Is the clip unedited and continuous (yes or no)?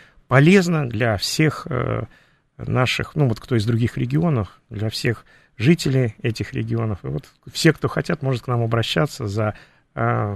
yes